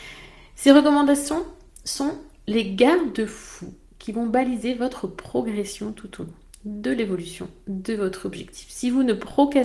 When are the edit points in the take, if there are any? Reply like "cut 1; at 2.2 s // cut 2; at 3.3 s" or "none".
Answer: none